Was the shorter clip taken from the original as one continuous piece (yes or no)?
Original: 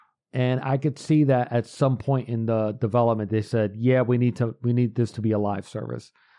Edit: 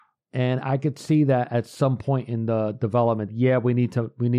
no